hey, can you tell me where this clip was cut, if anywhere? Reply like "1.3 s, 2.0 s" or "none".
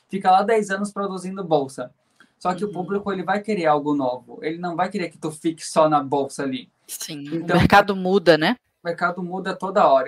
none